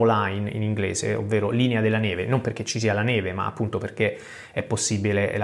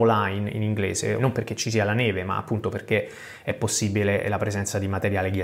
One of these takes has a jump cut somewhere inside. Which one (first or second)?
second